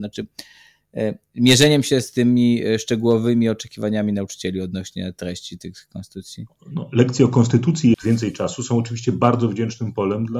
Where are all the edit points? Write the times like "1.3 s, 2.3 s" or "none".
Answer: 7.9 s

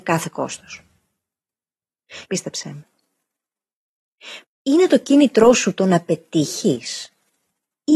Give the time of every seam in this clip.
2.2 s, 4.4 s

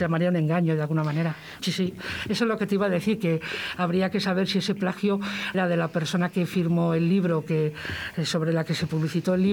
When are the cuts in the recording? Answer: 1.6 s, 5.5 s

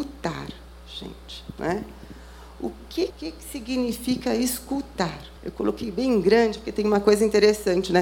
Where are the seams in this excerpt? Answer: 3.1 s, 5.4 s

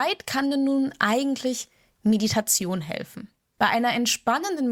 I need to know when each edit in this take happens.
3.6 s

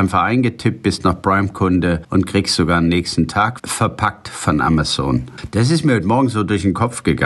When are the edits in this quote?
3.6 s

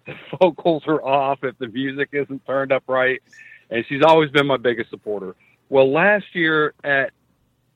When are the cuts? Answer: none

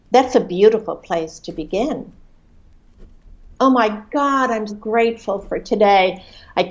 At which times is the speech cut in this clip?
3.5 s, 4.7 s

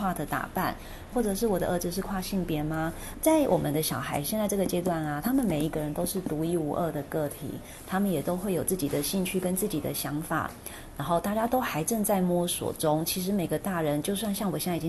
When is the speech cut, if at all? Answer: 1.1 s, 3.1 s

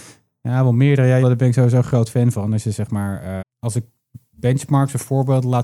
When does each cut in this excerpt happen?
1.2 s, 3.4 s

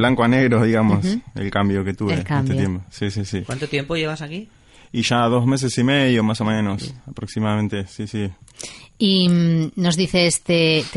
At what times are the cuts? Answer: none

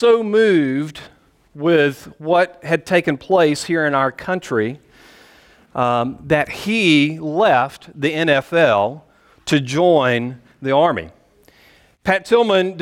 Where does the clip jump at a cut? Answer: none

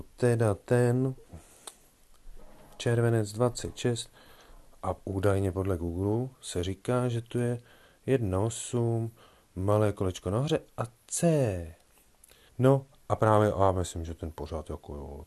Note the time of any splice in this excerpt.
12.5 s

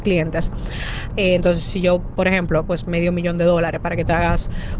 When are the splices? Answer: 1.1 s, 2.7 s

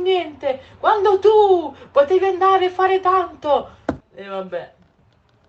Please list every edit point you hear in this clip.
4.0 s

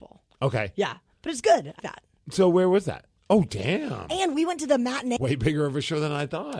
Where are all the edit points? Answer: 1.8 s, 3.2 s, 5.2 s

